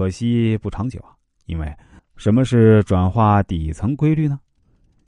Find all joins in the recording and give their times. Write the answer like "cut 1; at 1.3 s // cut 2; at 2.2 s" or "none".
cut 1; at 2.0 s